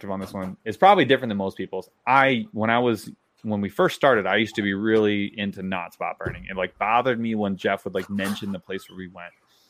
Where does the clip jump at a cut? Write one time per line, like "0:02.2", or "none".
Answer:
none